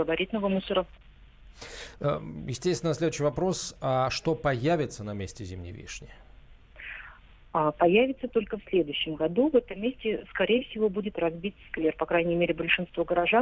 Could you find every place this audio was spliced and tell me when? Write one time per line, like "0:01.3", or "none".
none